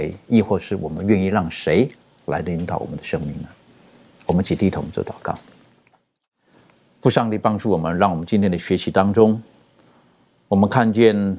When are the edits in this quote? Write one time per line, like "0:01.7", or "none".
none